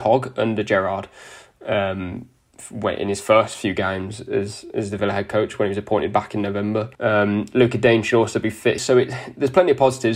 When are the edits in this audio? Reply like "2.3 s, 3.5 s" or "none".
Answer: 6.9 s, 8.8 s